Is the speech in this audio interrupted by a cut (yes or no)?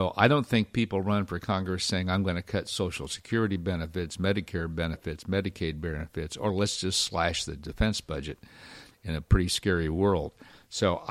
no